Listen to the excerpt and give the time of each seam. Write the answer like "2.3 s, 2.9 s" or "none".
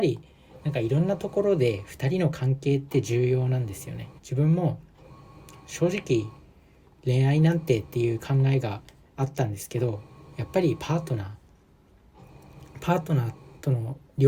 4.2 s